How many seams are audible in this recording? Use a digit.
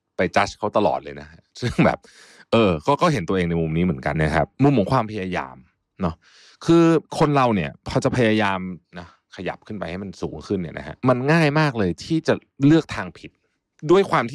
1